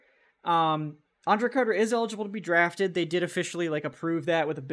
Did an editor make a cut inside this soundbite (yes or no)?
no